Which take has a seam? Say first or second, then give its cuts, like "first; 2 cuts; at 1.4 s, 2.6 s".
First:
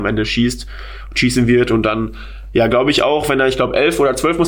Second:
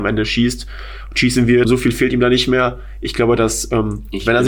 second; 1 cut; at 1.6 s